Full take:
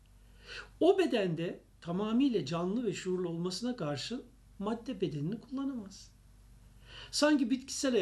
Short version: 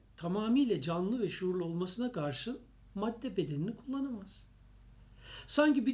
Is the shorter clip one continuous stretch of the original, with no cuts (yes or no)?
yes